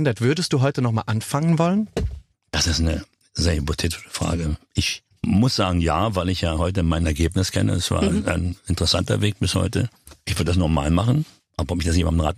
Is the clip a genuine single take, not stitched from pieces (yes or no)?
yes